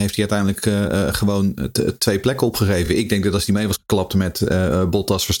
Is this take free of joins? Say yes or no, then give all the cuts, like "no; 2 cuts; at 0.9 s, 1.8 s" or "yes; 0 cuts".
yes; 0 cuts